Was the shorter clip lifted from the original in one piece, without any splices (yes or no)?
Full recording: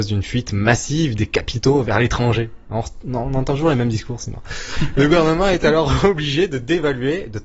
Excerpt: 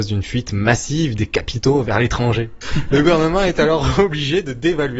no